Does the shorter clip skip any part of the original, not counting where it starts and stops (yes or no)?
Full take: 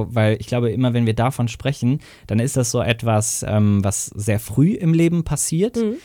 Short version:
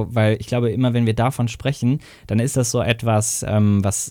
no